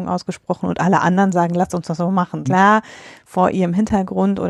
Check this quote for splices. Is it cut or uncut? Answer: cut